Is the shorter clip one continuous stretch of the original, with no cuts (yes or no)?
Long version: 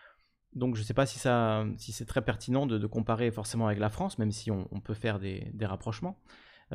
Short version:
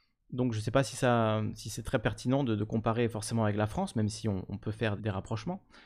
no